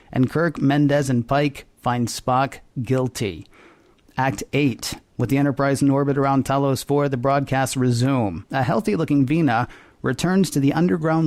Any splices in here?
yes; 1 cut; at 8.5 s

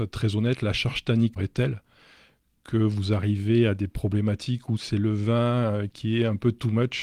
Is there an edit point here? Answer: yes; 1 cut; at 1.4 s

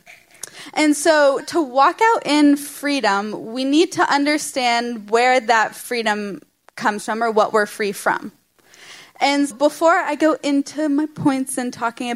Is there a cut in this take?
yes; 2 cuts; at 1.4 s, 9.5 s

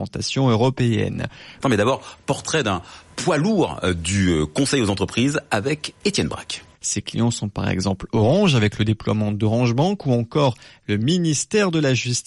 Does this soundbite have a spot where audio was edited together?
yes; 2 cuts; at 1.6 s, 6.8 s

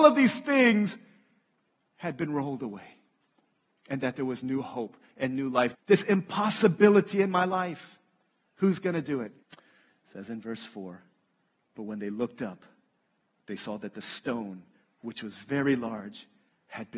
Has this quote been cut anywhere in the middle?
yes; 2 cuts; at 5.7 s, 9.4 s

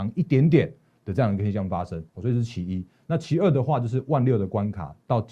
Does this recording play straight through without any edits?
yes; 0 cuts

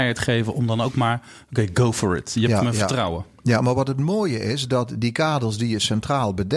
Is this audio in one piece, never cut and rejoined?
yes; 0 cuts

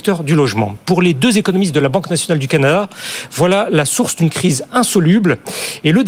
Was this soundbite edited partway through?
no; 0 cuts

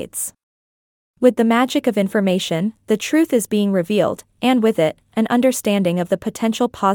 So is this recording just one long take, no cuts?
yes; 0 cuts

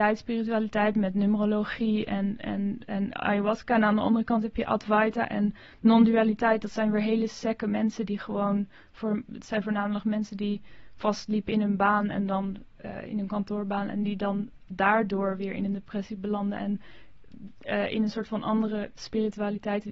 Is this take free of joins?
yes; 0 cuts

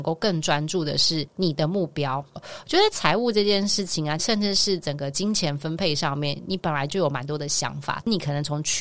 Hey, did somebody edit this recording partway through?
yes; 2 cuts; at 2.4 s, 4.2 s

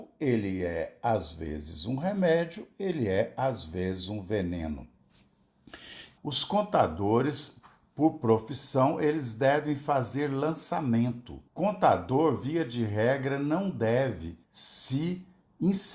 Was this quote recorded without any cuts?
no; 3 cuts; at 6.2 s, 11.5 s, 14.4 s

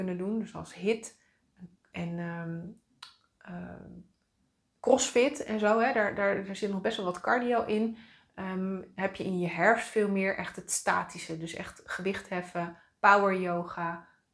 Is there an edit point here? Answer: no; 0 cuts

